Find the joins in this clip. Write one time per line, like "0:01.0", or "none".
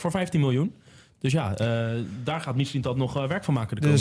none